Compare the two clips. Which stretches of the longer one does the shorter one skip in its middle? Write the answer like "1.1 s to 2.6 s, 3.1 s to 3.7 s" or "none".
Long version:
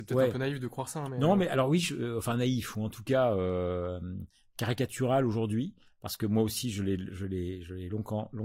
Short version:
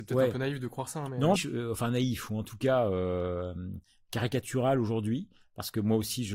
1.4 s to 1.8 s